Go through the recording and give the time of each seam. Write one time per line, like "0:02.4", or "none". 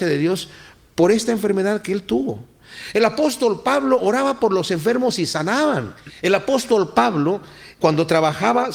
none